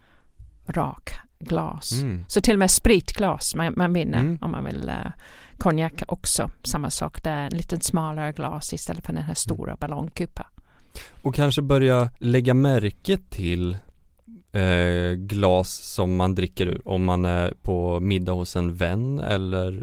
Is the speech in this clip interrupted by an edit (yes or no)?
yes